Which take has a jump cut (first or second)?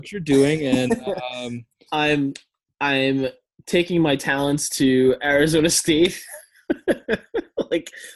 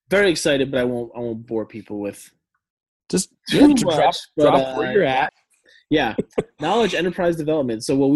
second